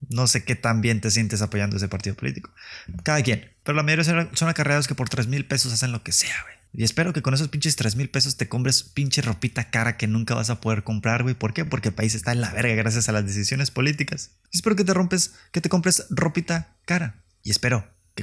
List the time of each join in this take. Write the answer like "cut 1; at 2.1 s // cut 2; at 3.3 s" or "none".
none

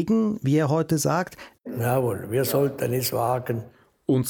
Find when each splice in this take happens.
cut 1; at 1.6 s

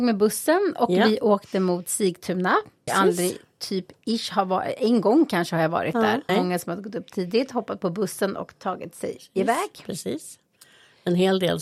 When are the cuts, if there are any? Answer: cut 1; at 2.9 s // cut 2; at 6.3 s

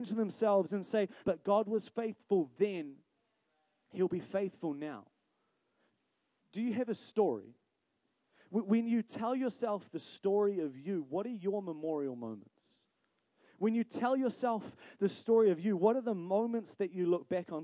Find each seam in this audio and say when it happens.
cut 1; at 1.2 s

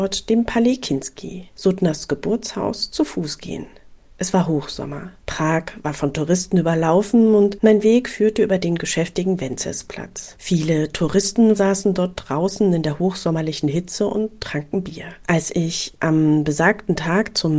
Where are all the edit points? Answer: cut 1; at 11.6 s // cut 2; at 15.2 s

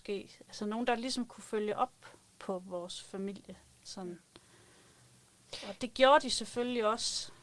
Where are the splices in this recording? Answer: cut 1; at 5.8 s

